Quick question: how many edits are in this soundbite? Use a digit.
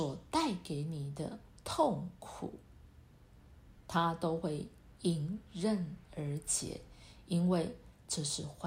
0